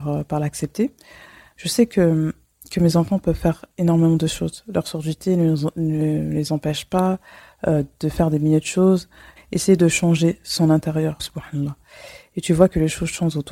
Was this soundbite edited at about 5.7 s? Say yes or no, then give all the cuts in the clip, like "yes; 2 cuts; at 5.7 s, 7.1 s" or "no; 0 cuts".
no; 2 cuts; at 9.4 s, 11.2 s